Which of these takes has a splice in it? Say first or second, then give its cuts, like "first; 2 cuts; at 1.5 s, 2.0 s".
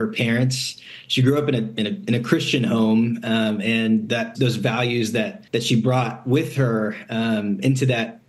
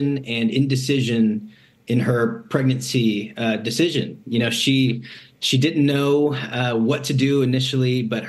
first; 2 cuts; at 4.3 s, 5.5 s